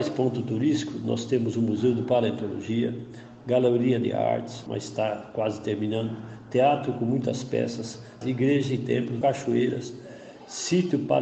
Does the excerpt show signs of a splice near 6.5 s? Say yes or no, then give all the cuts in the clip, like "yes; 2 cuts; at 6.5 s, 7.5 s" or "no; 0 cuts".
no; 3 cuts; at 4.7 s, 8.2 s, 9.2 s